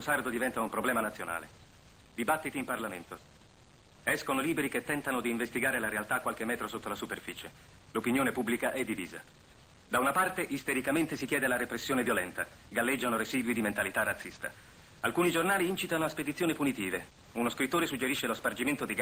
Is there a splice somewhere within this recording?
no; 0 cuts

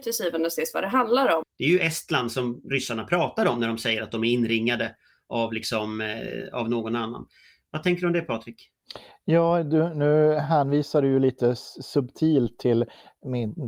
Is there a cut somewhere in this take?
yes; 1 cut; at 1.4 s

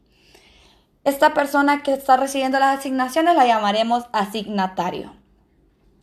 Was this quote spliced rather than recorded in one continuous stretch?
no; 0 cuts

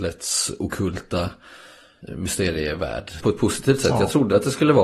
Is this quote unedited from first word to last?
no; 1 cut; at 3.2 s

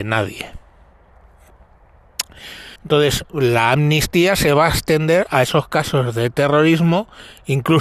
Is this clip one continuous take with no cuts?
no; 1 cut; at 2.8 s

